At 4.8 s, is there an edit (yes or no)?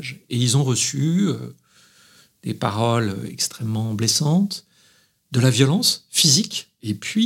no